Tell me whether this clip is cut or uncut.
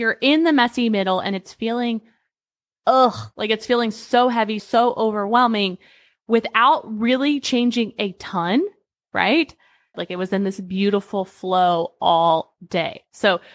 cut